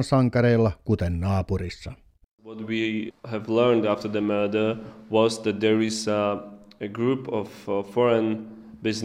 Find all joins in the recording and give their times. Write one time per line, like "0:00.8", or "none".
none